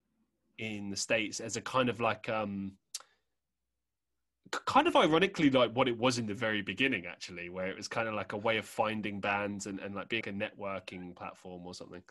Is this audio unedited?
no; 1 cut; at 10.2 s

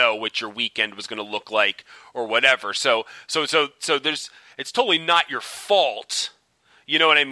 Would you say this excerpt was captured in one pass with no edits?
yes; 0 cuts

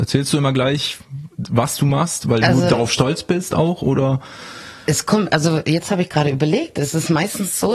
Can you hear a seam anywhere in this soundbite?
no; 0 cuts

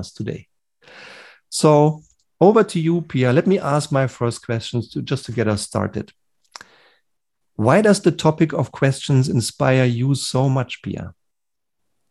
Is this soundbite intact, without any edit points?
yes; 0 cuts

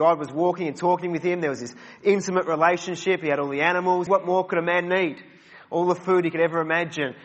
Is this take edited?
yes; 1 cut; at 4.1 s

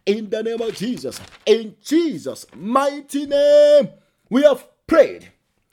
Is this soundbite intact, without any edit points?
yes; 0 cuts

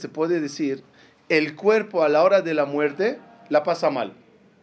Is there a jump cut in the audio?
no; 0 cuts

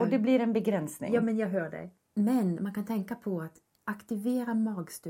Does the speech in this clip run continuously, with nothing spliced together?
no; 1 cut; at 2.0 s

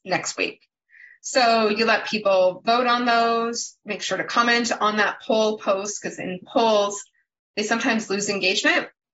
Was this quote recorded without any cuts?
yes; 0 cuts

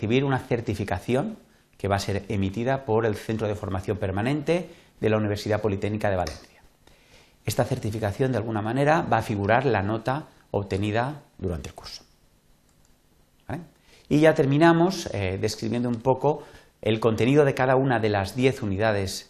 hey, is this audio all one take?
yes; 0 cuts

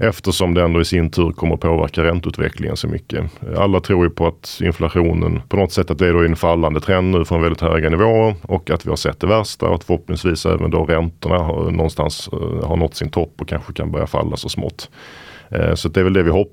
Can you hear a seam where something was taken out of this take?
yes; 1 cut; at 5.5 s

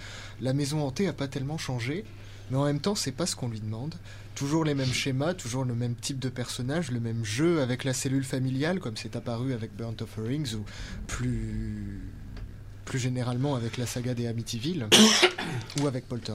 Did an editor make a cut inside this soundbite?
yes; 1 cut; at 11.1 s

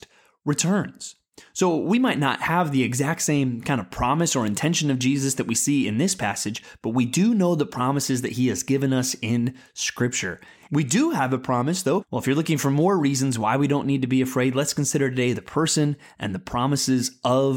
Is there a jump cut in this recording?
yes; 2 cuts; at 10.7 s, 12.0 s

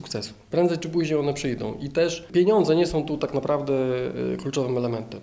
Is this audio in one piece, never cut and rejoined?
yes; 0 cuts

